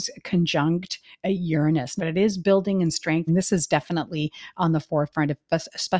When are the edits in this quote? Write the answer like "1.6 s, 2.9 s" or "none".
2.0 s, 3.3 s